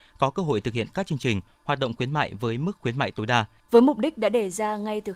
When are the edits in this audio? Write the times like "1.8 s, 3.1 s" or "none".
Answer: 3.6 s